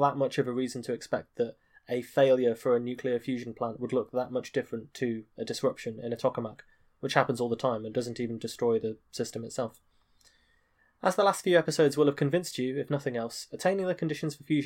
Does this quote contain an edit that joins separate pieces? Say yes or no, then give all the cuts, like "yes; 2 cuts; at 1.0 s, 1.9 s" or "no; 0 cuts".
no; 0 cuts